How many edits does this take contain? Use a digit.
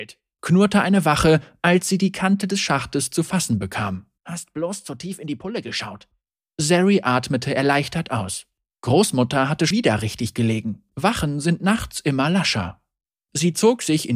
2